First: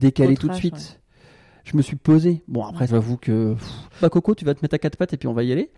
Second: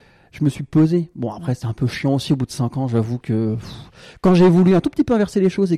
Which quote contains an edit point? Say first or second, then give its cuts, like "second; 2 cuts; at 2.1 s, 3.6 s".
first; 2 cuts; at 2.9 s, 4.0 s